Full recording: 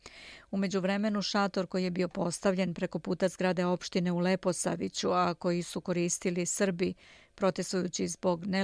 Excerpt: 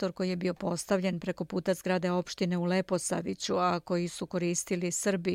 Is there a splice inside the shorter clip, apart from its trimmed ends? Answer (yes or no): no